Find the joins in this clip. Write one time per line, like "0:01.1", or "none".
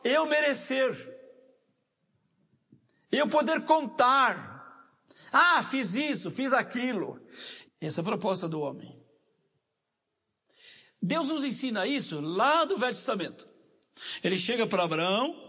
0:07.6